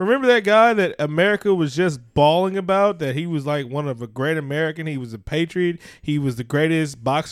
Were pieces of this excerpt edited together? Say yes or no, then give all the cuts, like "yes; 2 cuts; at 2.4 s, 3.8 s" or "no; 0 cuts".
no; 0 cuts